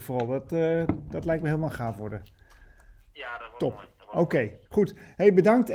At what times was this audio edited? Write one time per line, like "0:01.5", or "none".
0:04.6